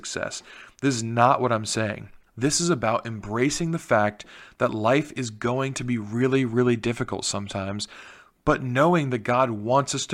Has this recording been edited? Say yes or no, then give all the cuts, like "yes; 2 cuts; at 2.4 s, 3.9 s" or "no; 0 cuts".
yes; 1 cut; at 2.3 s